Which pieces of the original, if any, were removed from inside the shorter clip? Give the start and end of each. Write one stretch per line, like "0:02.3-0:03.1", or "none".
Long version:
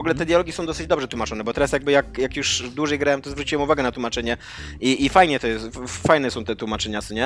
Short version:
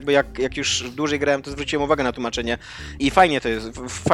0:04.8-0:05.0